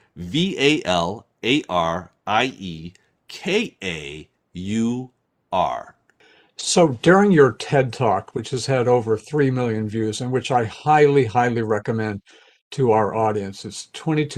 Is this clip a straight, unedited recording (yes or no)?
yes